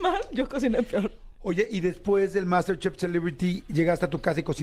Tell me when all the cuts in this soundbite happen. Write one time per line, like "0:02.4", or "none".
none